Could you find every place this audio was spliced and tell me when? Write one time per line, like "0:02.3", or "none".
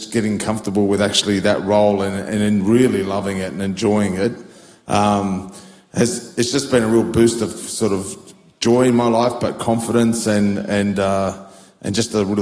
none